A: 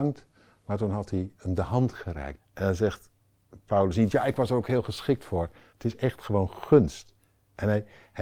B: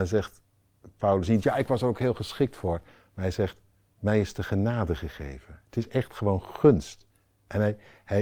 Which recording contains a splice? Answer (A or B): A